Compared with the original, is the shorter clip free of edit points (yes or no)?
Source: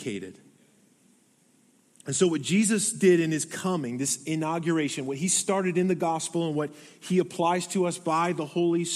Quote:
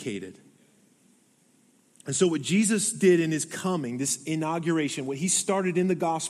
yes